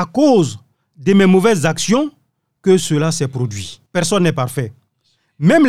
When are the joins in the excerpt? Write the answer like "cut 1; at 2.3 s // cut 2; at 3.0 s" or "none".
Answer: cut 1; at 3.9 s

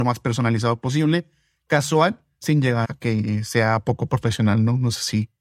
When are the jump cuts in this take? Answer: cut 1; at 2.8 s

